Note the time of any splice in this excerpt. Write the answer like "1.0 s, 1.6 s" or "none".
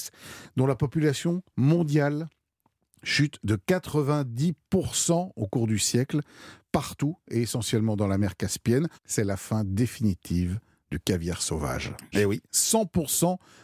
8.9 s, 12.1 s